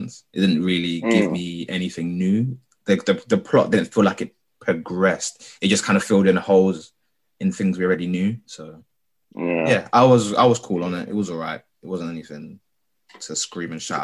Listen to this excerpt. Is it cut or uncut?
uncut